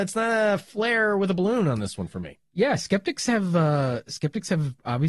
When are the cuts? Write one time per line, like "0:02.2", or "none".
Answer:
none